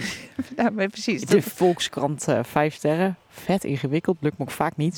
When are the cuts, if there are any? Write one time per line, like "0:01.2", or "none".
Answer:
none